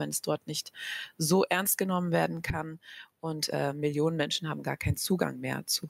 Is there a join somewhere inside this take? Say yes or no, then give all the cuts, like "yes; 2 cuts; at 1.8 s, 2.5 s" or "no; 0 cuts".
no; 0 cuts